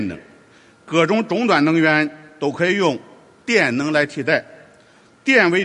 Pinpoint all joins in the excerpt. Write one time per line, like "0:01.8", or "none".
none